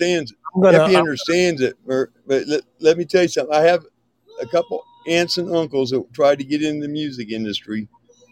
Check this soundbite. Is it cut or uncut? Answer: uncut